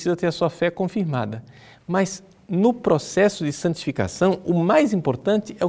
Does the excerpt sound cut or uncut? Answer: uncut